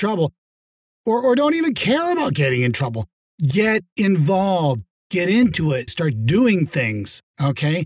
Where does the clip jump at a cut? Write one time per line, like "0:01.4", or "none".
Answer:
0:05.9